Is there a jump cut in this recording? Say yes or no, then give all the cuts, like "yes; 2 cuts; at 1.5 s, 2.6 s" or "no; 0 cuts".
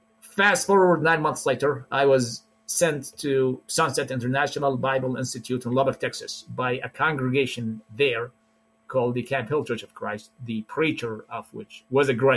no; 0 cuts